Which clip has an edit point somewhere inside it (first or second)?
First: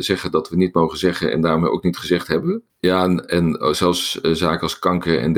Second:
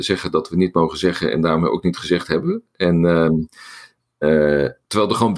first